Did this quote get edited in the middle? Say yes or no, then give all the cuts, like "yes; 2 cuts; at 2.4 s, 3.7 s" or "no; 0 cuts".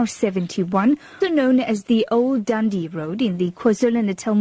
yes; 1 cut; at 1.2 s